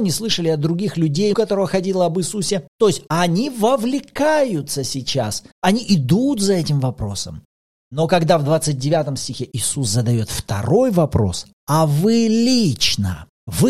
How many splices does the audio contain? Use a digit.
1